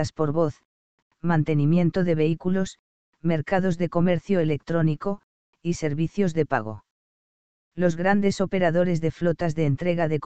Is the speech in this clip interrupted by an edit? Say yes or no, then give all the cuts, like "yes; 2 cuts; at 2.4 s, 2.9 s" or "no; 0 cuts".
yes; 1 cut; at 1.0 s